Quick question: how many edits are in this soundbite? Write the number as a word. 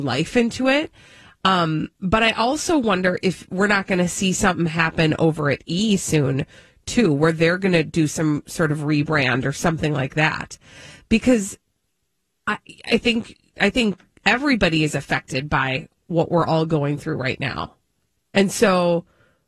one